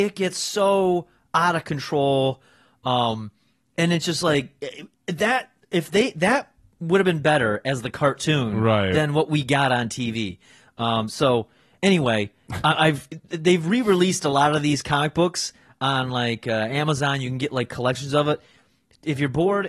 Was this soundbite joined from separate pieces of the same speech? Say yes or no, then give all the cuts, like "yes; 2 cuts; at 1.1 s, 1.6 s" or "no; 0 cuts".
no; 0 cuts